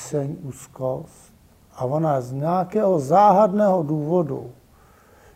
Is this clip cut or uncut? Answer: uncut